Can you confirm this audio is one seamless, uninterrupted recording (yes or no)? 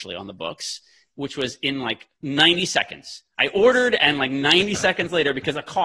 no